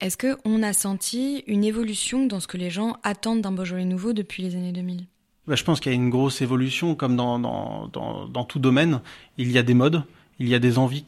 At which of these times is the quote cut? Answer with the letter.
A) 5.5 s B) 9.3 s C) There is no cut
C